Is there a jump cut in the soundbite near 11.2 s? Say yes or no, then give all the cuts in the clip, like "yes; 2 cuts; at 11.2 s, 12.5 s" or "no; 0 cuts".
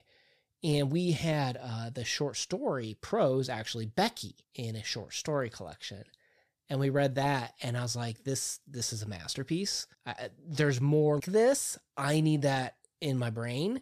yes; 3 cuts; at 4.4 s, 9.9 s, 11.2 s